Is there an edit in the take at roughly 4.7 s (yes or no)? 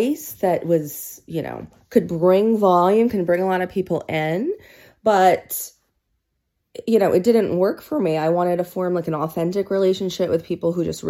no